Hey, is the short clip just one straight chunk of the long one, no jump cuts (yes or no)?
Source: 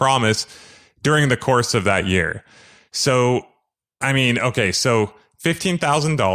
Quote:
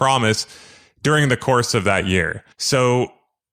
no